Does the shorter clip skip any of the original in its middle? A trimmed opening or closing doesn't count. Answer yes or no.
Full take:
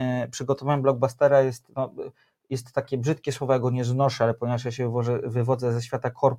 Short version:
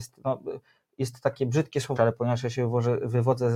yes